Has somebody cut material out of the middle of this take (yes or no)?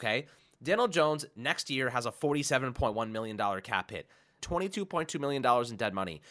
yes